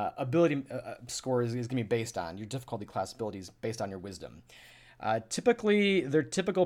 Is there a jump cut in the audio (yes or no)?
no